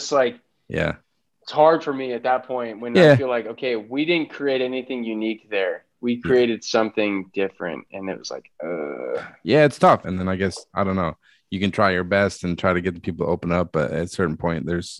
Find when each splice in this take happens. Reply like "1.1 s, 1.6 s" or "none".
10.0 s